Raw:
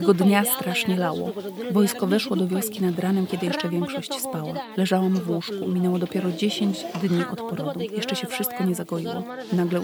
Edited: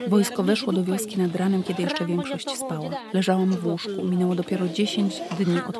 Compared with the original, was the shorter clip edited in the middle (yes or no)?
no